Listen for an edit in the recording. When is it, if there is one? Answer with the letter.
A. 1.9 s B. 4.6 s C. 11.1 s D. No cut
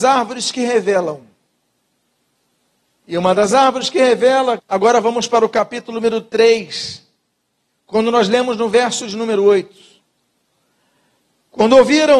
B